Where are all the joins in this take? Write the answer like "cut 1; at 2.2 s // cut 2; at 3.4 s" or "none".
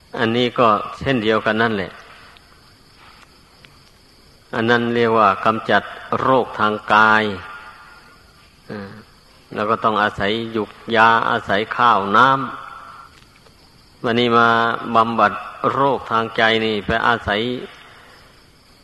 cut 1; at 13.1 s